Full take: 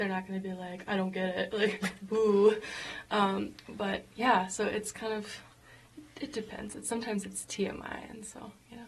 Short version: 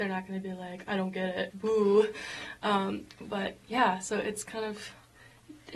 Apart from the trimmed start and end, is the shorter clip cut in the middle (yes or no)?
yes